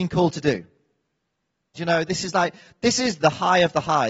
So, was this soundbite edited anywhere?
yes; 1 cut; at 1.8 s

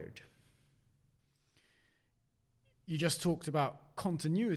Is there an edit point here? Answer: no; 0 cuts

